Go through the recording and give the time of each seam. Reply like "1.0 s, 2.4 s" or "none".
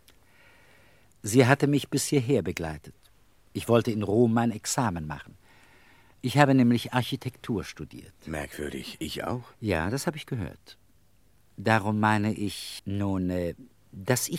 12.8 s